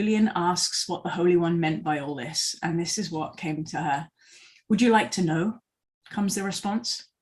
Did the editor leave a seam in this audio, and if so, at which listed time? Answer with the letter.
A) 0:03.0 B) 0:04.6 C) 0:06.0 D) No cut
D